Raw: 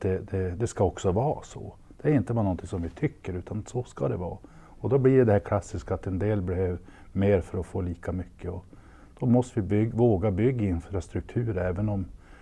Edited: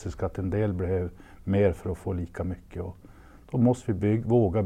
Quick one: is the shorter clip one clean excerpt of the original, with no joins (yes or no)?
yes